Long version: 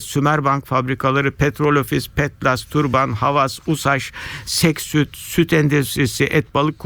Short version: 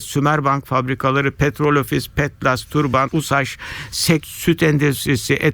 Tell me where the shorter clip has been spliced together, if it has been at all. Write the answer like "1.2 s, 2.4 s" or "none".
3.1 s, 4.2 s